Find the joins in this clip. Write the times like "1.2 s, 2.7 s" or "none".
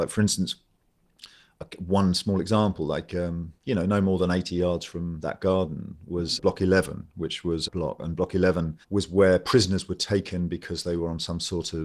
6.4 s, 7.7 s, 8.8 s